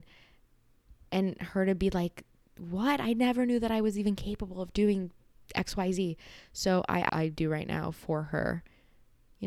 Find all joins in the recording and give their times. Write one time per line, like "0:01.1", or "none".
0:07.1